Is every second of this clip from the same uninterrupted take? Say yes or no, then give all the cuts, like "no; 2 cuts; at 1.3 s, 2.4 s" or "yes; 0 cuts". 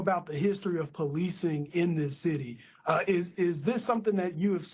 yes; 0 cuts